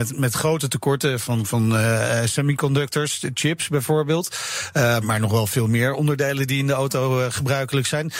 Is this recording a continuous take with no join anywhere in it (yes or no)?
no